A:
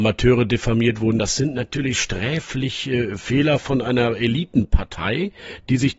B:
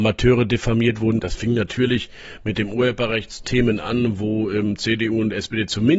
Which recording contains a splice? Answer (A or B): B